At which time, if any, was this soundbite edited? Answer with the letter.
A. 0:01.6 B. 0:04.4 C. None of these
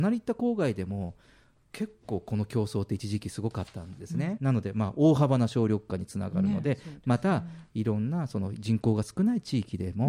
B